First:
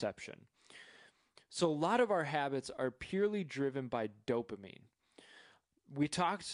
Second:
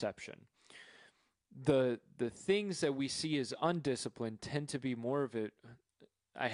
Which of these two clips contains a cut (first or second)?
first